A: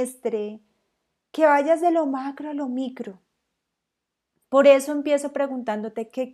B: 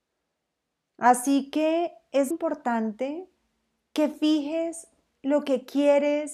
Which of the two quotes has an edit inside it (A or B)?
B